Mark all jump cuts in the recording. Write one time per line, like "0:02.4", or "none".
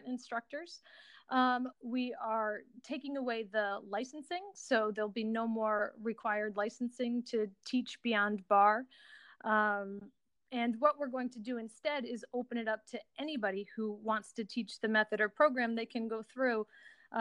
0:01.7